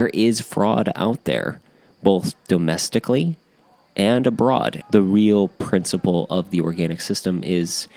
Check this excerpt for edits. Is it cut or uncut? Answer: cut